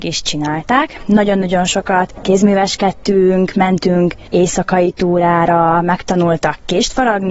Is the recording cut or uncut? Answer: uncut